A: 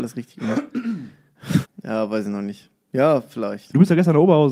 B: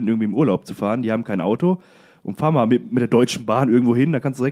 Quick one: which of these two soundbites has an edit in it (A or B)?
A